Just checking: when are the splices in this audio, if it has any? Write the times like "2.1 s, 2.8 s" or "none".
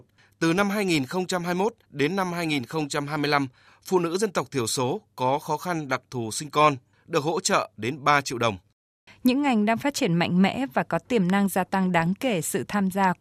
6.9 s, 9.1 s